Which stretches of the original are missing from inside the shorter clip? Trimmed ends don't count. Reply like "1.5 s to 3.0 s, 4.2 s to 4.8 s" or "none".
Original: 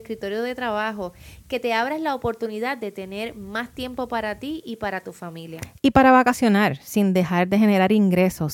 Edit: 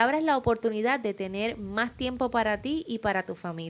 none